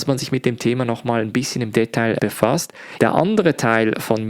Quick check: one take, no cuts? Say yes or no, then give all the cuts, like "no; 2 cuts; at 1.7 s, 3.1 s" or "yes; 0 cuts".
no; 1 cut; at 3.0 s